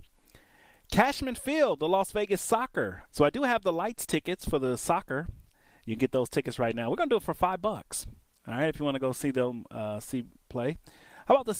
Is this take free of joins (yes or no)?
no